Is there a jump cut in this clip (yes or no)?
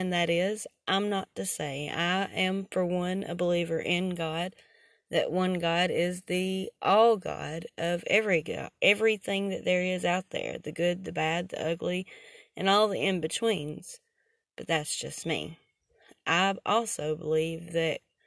no